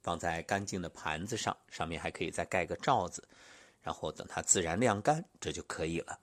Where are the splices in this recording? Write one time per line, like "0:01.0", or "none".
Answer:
none